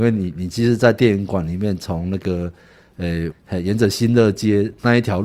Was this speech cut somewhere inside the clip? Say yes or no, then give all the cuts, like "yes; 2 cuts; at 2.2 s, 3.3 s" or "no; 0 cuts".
yes; 1 cut; at 3.3 s